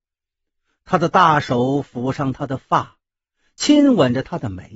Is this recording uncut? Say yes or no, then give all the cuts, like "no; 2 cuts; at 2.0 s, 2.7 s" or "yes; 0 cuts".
yes; 0 cuts